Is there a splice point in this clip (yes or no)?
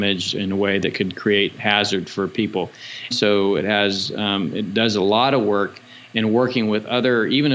yes